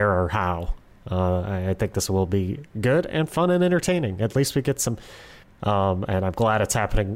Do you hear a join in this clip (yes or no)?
yes